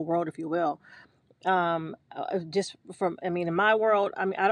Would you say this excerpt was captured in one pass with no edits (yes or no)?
yes